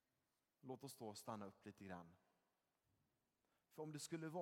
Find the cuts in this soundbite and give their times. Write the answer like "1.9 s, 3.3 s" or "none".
none